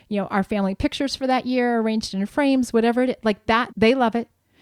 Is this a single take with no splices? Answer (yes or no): no